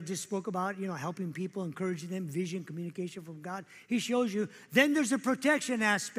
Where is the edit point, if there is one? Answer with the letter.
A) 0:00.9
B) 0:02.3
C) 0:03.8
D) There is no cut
D